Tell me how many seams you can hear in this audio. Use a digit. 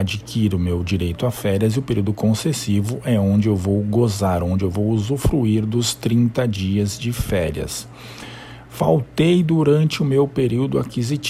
0